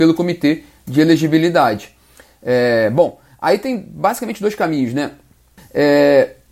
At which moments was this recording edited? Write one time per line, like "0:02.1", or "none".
0:05.6